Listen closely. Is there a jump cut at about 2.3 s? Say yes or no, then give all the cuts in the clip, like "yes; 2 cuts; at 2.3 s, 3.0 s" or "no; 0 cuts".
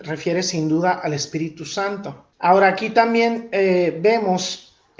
yes; 1 cut; at 2.3 s